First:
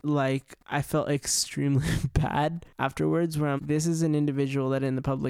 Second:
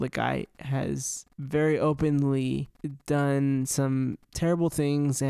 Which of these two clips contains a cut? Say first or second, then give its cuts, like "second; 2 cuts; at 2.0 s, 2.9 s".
first; 1 cut; at 3.6 s